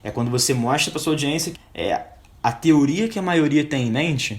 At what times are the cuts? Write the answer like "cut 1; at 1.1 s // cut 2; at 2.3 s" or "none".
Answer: cut 1; at 1.5 s